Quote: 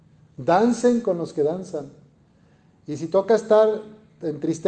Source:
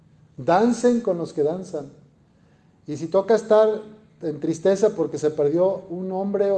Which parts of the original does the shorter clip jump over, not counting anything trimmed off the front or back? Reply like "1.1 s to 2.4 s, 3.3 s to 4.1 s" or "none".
none